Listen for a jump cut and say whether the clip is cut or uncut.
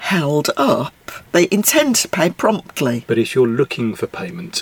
cut